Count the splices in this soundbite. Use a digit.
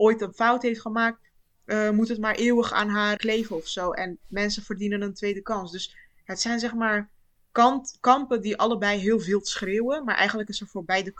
1